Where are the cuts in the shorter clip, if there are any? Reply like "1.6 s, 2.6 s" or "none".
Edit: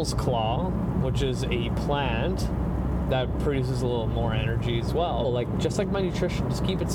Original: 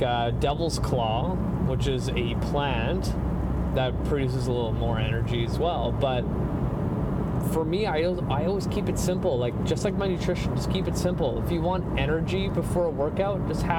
5.2 s